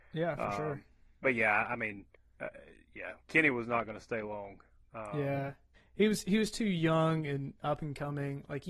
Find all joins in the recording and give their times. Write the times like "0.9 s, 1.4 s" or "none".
none